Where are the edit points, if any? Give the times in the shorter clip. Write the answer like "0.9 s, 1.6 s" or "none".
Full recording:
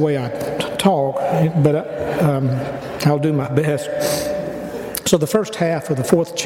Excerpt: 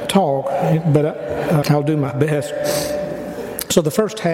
1.6 s

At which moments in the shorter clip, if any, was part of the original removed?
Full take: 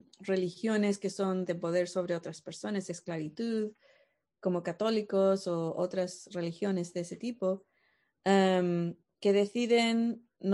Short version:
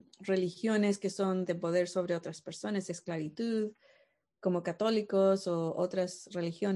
none

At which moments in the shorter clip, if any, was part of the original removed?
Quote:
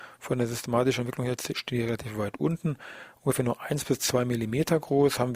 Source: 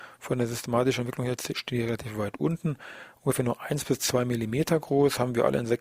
none

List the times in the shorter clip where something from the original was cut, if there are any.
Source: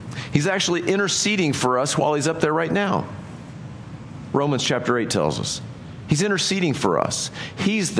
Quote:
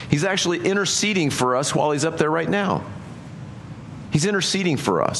4.1 s

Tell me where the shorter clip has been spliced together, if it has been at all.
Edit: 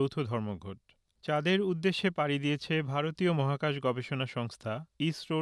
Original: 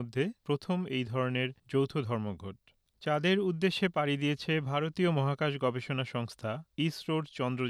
none

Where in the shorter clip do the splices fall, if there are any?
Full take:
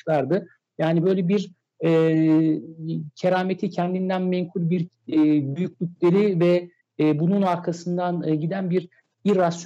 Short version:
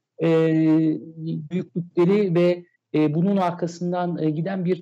1.5 s

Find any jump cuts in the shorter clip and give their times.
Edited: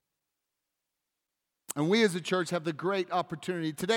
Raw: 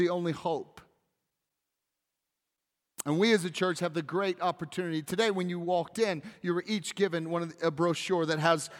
none

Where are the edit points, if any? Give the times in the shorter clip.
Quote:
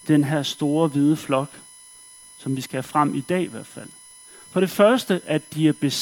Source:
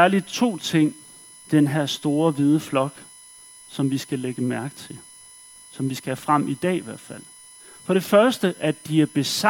2.2 s

